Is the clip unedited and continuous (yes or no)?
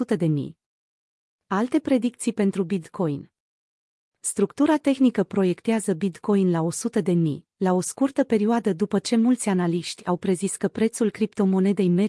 yes